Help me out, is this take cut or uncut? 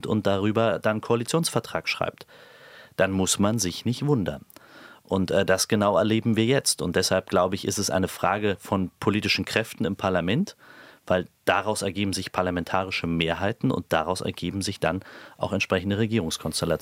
uncut